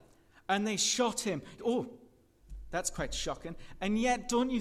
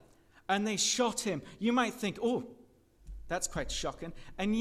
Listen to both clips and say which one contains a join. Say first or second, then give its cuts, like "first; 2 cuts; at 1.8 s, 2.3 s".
first; 1 cut; at 1.6 s